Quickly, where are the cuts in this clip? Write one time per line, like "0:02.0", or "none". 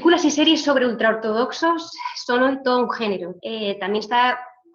0:03.4